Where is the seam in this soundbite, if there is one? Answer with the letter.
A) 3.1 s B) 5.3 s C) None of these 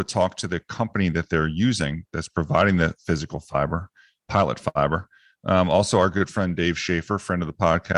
C